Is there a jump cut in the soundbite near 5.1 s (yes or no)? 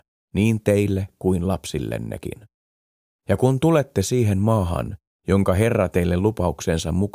no